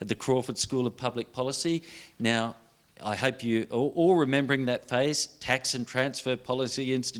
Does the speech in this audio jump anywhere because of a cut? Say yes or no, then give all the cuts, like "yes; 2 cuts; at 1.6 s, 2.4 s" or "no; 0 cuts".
no; 0 cuts